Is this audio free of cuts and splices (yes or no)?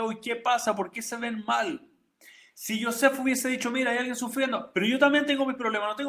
yes